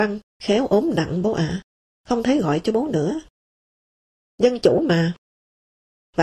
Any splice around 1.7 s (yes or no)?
no